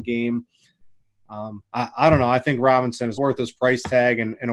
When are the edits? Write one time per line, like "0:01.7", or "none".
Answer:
0:03.2